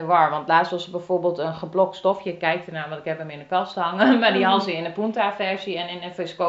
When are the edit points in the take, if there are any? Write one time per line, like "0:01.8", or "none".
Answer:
none